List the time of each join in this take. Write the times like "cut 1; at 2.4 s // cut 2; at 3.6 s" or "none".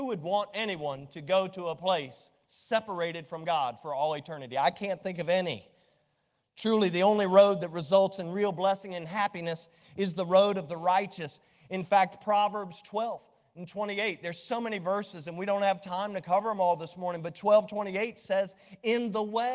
none